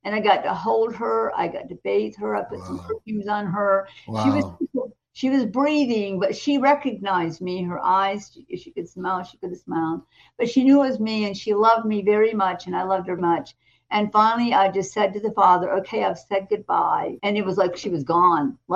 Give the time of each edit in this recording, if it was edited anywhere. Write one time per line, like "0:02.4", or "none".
0:13.2
0:17.2